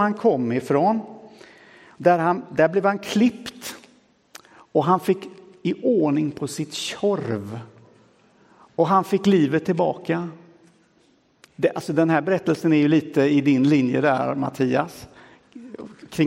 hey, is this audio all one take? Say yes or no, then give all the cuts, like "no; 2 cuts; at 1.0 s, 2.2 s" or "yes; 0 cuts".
yes; 0 cuts